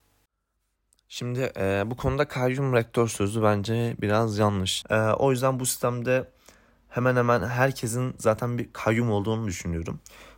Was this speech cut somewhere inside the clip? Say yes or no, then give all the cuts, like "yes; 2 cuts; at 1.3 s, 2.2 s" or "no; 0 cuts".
yes; 1 cut; at 4.8 s